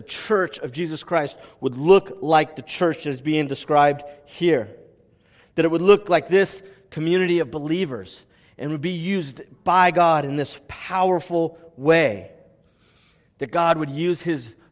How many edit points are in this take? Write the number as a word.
zero